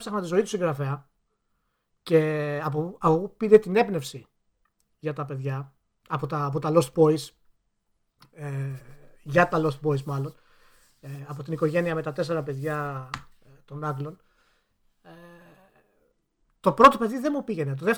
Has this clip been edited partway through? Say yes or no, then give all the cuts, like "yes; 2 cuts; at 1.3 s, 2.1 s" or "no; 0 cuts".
no; 0 cuts